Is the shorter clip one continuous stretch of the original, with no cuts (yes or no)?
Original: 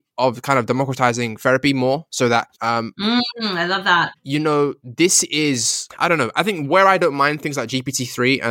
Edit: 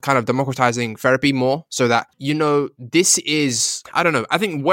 no